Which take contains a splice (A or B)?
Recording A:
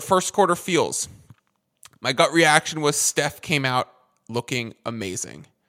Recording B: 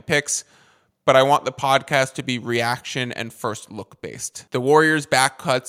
B